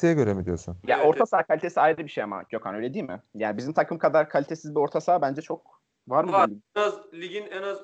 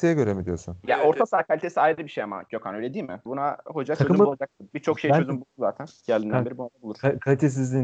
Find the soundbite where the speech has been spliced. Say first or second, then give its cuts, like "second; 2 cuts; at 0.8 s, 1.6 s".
second; 1 cut; at 3.3 s